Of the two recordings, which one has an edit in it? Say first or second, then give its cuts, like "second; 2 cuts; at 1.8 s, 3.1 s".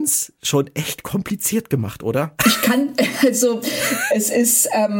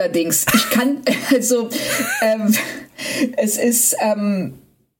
first; 2 cuts; at 2.4 s, 4.1 s